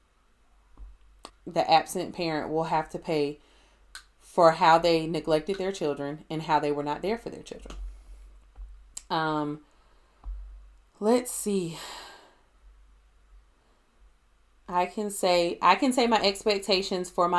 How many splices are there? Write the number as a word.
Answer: one